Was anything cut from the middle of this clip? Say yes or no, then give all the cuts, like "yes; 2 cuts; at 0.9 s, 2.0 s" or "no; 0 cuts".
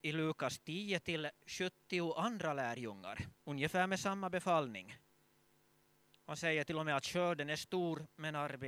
yes; 1 cut; at 3.4 s